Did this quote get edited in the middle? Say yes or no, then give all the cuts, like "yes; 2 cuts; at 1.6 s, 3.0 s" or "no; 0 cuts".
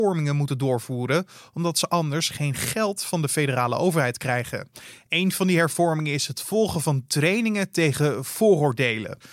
no; 0 cuts